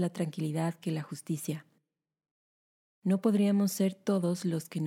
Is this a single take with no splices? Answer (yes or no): yes